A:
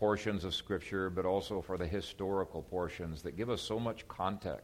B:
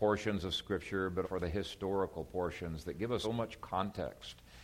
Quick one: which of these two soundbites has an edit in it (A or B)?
B